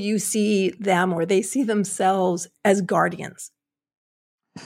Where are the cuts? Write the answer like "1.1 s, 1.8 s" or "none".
2.5 s